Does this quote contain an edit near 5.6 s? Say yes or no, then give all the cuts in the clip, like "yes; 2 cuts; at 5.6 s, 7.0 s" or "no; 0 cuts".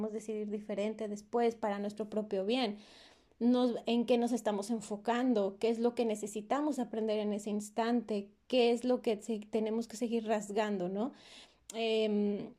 no; 0 cuts